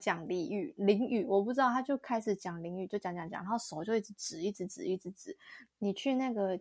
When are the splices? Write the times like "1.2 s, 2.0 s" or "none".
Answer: 5.7 s

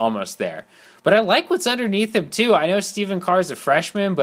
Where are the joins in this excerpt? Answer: none

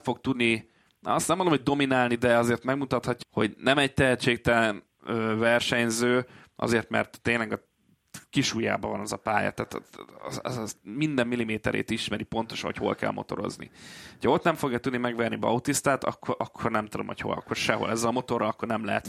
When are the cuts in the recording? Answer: 3.2 s

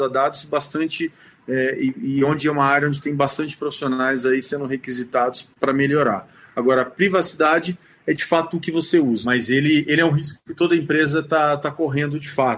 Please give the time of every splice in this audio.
9.2 s

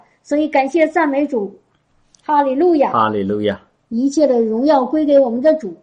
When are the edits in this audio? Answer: none

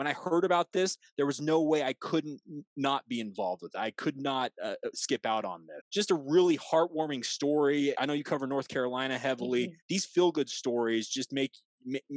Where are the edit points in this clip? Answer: 5.8 s, 8.0 s, 9.8 s

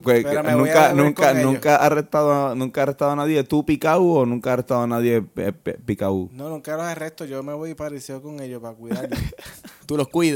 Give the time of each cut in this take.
none

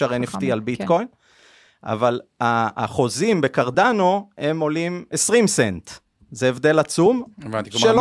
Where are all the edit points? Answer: none

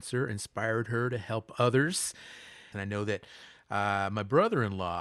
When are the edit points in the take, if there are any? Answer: 2.7 s

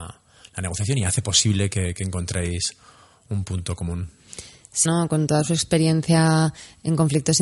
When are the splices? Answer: 4.9 s

